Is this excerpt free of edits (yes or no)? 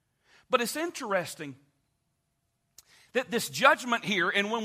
yes